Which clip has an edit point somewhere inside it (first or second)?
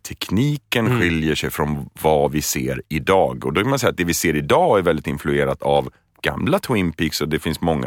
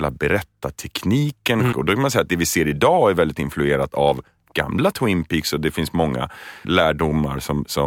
second